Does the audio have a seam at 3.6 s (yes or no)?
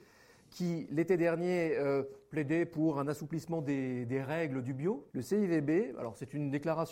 no